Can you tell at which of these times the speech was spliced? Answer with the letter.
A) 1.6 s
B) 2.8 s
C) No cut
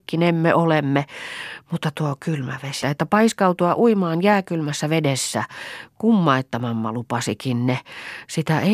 B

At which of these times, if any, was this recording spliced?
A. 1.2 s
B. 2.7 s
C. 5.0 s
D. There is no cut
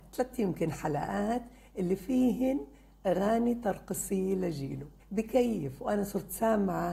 C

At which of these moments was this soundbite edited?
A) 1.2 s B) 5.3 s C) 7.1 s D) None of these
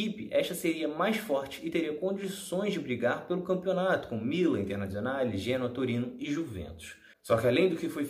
C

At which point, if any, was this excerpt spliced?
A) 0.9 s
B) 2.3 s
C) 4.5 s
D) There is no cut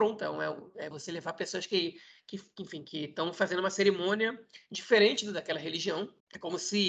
A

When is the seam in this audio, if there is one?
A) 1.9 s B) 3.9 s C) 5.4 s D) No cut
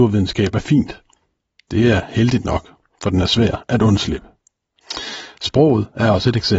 C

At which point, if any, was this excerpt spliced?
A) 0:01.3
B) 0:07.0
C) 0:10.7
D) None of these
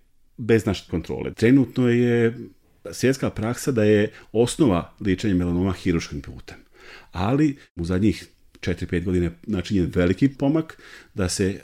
A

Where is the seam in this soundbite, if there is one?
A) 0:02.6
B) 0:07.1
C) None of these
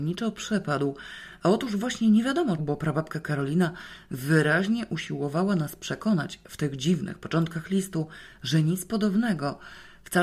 A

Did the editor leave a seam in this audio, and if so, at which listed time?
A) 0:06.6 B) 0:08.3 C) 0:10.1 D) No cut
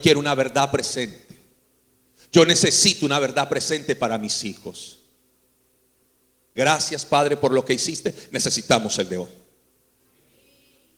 A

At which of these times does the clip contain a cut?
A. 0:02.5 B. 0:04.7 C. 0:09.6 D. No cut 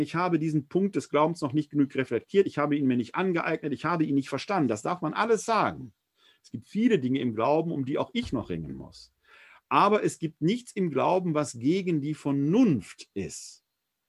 D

